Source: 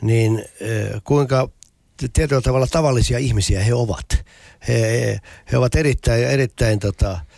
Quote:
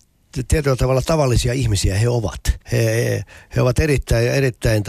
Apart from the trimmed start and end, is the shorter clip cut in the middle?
yes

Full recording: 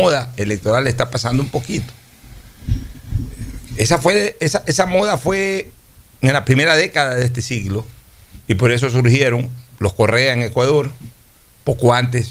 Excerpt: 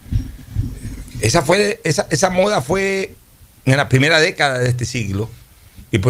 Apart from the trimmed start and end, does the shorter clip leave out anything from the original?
no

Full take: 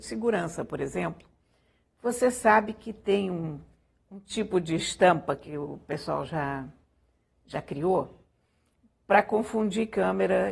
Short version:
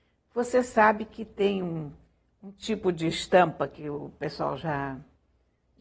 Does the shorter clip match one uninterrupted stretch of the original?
yes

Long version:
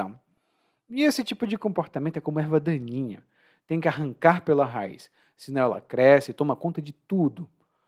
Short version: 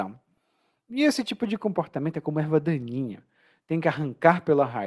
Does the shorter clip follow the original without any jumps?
yes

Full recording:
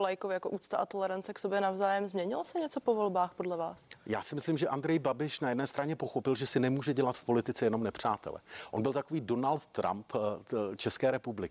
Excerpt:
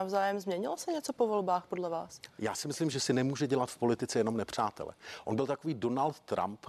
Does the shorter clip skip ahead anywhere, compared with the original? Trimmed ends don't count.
yes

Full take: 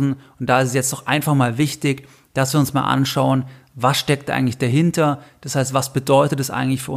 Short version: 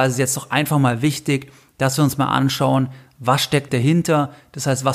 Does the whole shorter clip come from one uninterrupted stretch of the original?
no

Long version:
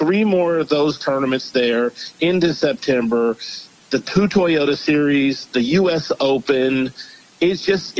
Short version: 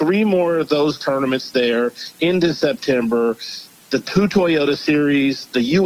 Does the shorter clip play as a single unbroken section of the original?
yes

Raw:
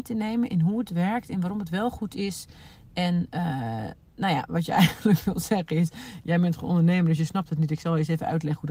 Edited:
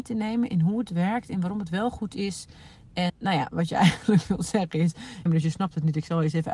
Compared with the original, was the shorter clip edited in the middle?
yes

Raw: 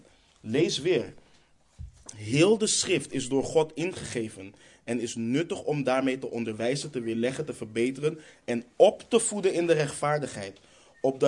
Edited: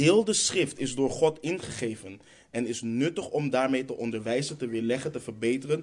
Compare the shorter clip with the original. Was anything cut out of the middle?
no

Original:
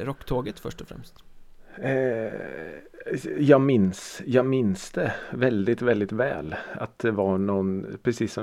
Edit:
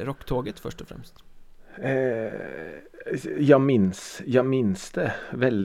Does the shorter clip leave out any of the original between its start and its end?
no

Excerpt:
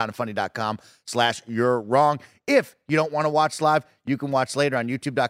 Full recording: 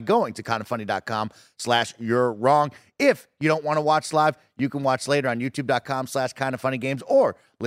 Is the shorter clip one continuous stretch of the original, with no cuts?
yes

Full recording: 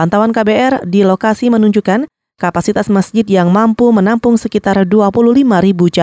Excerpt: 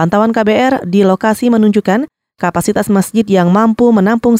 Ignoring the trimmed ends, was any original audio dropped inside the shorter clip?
no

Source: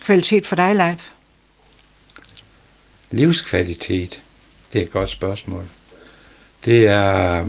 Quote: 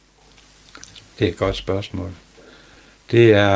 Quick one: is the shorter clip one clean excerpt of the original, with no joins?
no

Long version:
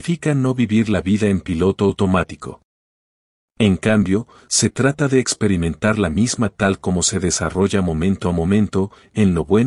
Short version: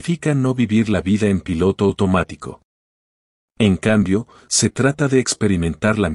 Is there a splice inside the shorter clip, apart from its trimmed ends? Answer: no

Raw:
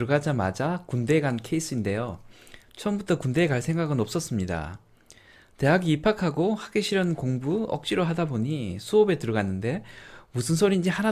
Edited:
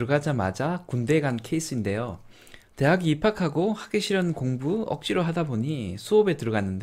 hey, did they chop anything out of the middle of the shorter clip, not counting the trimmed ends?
yes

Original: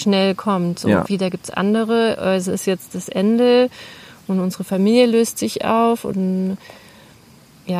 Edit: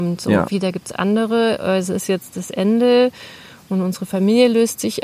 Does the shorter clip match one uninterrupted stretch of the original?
yes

